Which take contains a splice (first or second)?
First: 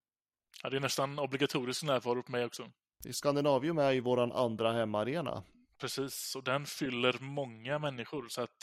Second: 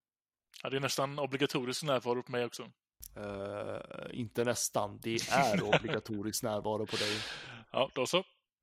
first